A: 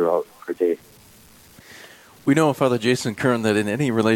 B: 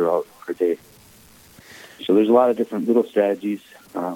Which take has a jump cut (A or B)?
B